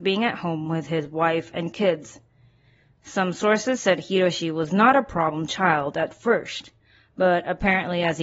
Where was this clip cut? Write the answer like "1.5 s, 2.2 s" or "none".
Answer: none